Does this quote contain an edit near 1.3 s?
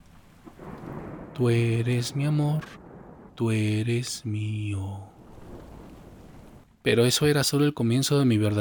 no; 2 cuts; at 3.3 s, 6.6 s

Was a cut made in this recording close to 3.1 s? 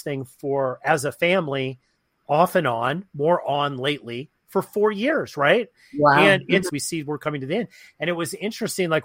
no; 1 cut; at 6.7 s

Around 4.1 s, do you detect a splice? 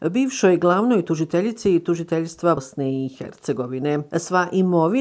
no; 1 cut; at 2.6 s

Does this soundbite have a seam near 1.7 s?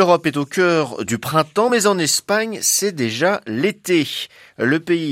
no; 0 cuts

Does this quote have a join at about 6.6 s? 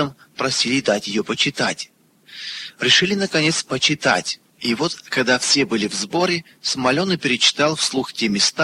no; 1 cut; at 4.5 s

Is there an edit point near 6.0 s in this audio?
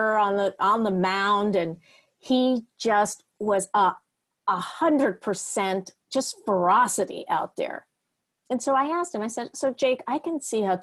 yes; 1 cut; at 6.0 s

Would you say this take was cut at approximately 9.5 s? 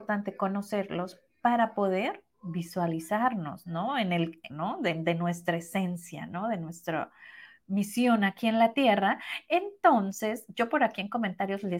no; 1 cut; at 4.5 s

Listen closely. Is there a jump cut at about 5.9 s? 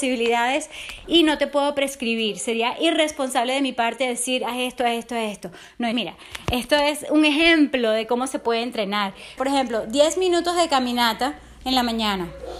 yes; 2 cuts; at 5.9 s, 9.4 s

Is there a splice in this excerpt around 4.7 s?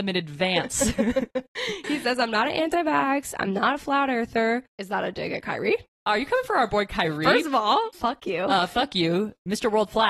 yes; 1 cut; at 4.7 s

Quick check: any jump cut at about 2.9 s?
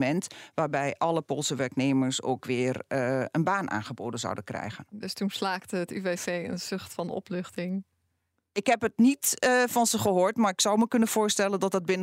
no; 0 cuts

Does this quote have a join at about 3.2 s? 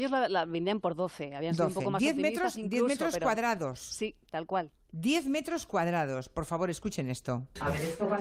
no; 0 cuts

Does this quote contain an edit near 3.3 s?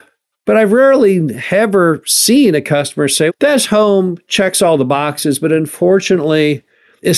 yes; 1 cut; at 3.3 s

